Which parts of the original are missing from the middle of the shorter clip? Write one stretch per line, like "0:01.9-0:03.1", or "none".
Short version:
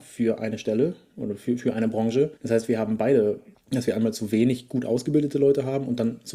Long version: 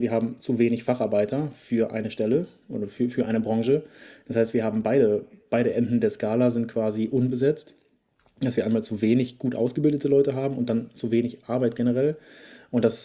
0:03.9-0:04.2
0:05.4-0:08.2